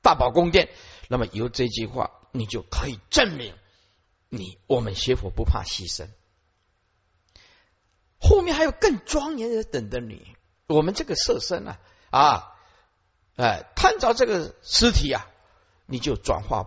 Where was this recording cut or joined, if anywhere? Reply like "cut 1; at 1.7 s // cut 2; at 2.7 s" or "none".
none